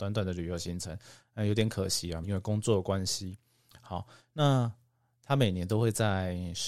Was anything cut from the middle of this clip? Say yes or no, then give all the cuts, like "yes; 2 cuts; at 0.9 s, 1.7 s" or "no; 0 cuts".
yes; 1 cut; at 2.2 s